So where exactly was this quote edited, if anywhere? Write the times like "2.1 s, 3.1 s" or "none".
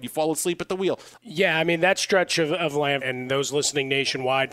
1.2 s, 3.0 s